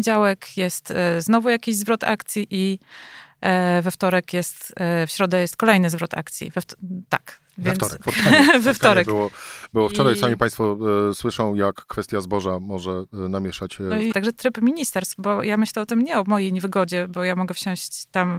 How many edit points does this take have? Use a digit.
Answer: 2